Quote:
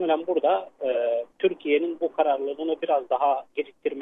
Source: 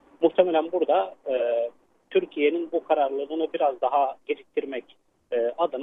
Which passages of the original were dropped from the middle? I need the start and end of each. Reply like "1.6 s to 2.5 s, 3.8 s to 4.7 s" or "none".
1.8 s to 2.0 s